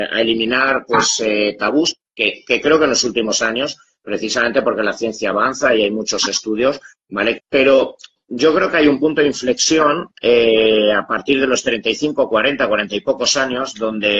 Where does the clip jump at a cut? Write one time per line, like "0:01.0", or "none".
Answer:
0:07.4